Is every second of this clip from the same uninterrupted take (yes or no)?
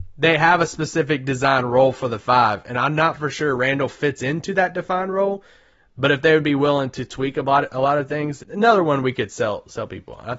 no